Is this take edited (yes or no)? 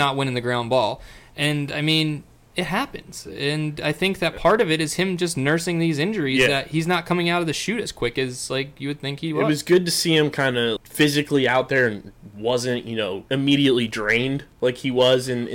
yes